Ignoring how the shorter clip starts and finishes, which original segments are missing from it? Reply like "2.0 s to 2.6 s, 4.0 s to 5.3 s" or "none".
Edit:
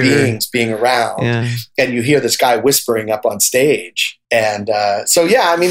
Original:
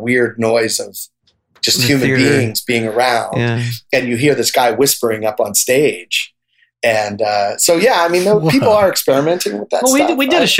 6.4 s to 6.8 s